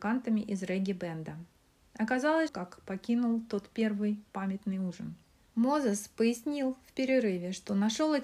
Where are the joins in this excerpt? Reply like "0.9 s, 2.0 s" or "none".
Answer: 2.5 s